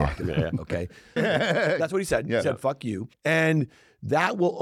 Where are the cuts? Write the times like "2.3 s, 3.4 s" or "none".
1.2 s